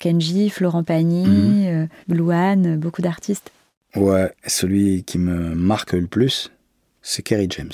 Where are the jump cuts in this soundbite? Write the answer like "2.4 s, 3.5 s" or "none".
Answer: none